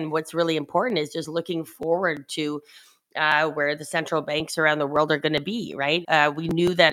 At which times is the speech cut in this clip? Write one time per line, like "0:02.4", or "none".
0:06.0